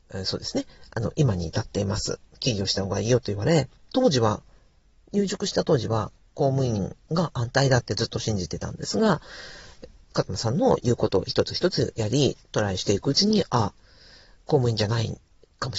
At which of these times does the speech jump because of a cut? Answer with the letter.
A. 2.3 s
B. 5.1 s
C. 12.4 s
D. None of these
D